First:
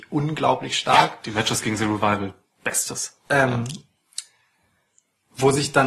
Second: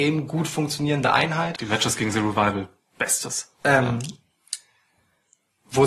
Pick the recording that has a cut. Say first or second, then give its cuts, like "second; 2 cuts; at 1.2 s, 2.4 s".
second; 1 cut; at 1.6 s